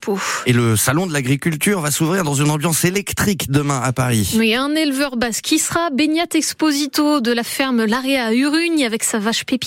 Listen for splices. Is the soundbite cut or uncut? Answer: uncut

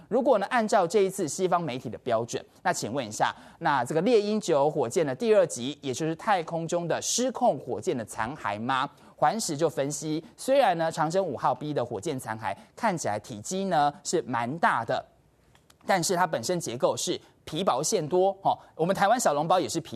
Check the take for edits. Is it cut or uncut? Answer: uncut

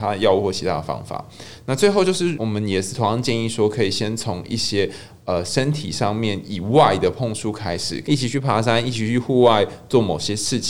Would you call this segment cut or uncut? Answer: cut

